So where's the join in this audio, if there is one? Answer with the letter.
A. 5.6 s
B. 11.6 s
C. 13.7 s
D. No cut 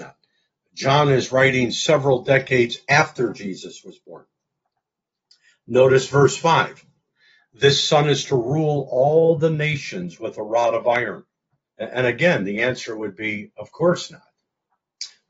B